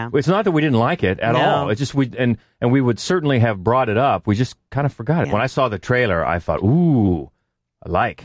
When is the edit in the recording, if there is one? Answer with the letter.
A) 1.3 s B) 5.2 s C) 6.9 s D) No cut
B